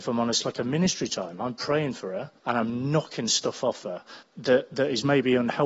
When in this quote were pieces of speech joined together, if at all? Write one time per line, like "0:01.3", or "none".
0:02.4
0:04.2